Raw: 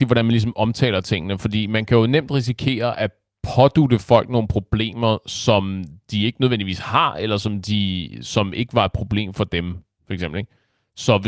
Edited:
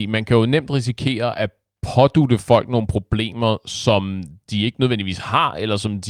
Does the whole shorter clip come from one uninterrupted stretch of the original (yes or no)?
yes